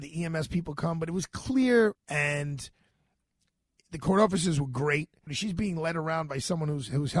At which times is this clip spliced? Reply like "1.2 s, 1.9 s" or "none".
1.9 s, 5.3 s